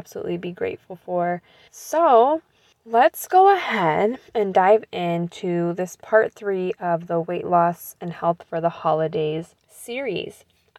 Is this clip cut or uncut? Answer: cut